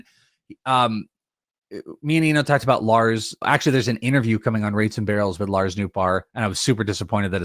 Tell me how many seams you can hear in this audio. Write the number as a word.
one